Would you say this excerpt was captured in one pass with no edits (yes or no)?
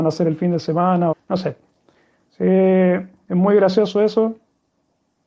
no